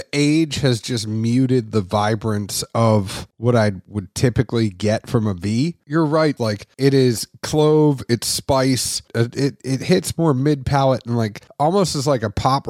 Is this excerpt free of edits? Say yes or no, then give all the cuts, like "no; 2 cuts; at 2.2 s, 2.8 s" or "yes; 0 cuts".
no; 2 cuts; at 6.4 s, 9.1 s